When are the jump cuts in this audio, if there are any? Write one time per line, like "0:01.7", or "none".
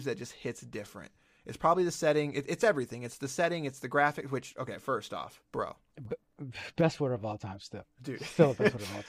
0:05.5